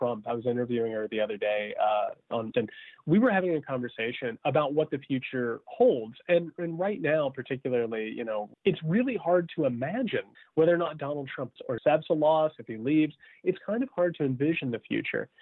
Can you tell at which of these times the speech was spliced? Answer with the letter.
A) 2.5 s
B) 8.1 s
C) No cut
A